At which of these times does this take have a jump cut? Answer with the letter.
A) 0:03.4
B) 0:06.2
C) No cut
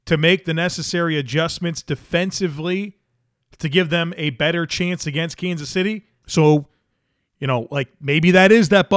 B